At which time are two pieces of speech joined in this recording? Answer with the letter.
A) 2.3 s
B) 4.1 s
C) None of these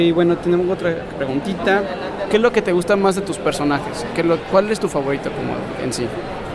C